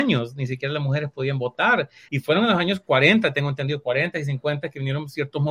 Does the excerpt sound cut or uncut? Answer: cut